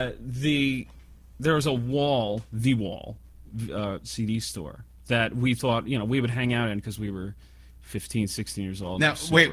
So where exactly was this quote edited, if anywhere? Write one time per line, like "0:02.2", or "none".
none